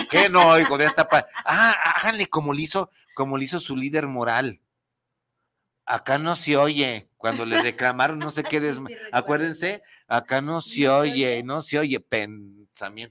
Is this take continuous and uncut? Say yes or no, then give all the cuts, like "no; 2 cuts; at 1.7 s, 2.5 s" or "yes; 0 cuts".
yes; 0 cuts